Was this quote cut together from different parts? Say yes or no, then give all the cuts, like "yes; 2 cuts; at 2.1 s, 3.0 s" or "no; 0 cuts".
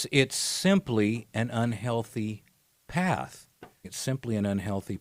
yes; 1 cut; at 3.8 s